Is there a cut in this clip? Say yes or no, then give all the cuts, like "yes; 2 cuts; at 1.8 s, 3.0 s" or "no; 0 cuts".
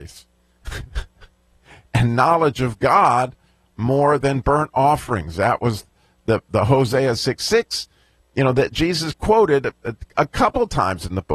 no; 0 cuts